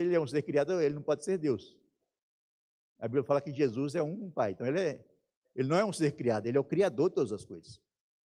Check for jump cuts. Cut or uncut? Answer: uncut